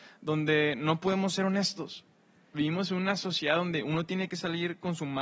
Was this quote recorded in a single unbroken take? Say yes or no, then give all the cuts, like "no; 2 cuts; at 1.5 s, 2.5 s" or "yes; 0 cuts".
no; 1 cut; at 2.5 s